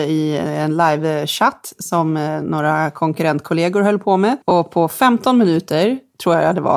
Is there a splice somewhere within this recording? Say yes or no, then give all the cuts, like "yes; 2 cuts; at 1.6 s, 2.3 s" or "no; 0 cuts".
yes; 1 cut; at 4.4 s